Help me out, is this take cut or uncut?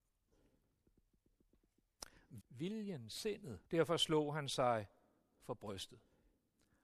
cut